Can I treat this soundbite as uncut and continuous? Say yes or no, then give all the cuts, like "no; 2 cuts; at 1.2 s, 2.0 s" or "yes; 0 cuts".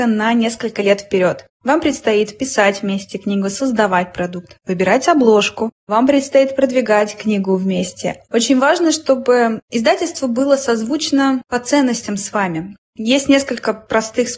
no; 1 cut; at 8.2 s